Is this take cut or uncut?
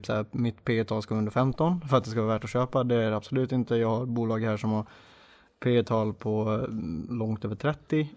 uncut